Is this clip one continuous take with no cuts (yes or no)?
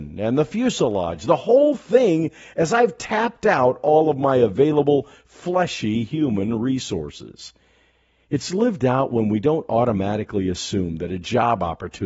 yes